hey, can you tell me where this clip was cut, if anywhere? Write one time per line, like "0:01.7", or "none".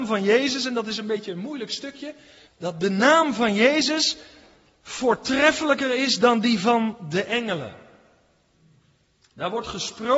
0:02.5